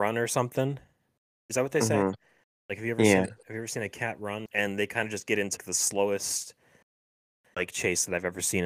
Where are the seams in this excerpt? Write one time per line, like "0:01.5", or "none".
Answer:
0:04.5
0:05.6